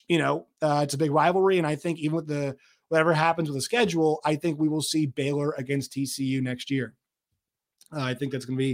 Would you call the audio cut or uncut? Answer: uncut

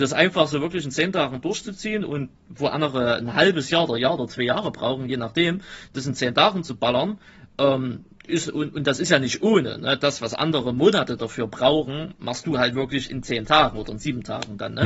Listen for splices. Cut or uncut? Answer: uncut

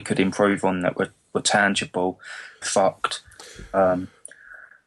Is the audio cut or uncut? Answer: cut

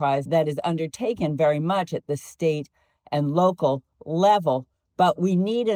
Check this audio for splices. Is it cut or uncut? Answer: uncut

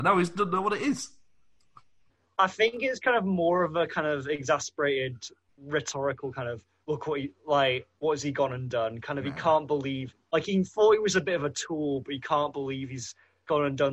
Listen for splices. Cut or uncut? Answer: uncut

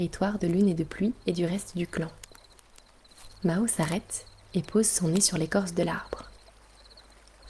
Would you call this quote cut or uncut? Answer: uncut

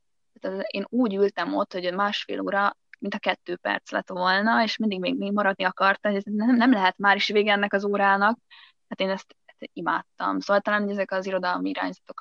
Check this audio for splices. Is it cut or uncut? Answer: uncut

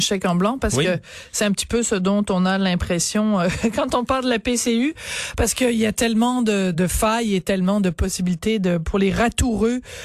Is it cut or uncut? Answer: cut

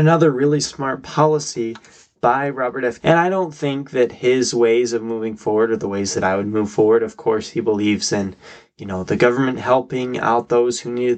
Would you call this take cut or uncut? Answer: cut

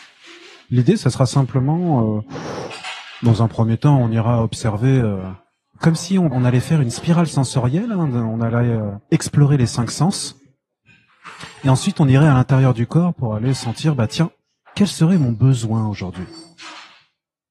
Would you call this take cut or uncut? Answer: uncut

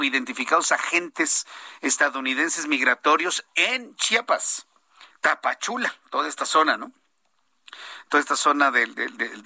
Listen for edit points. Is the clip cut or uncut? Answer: cut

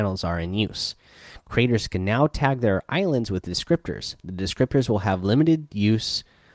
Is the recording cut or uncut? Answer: uncut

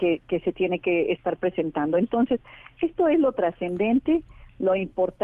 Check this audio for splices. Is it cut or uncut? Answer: uncut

